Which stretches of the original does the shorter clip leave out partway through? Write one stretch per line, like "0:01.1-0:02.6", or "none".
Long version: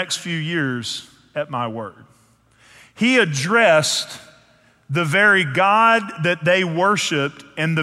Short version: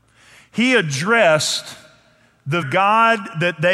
0:05.0-0:05.4